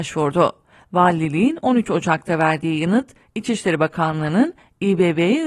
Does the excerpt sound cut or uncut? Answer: uncut